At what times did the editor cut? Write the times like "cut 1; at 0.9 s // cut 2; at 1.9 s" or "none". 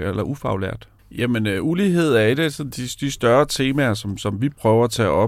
cut 1; at 1.0 s